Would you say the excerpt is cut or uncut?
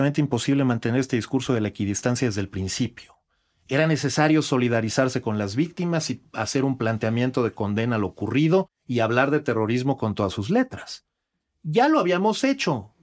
uncut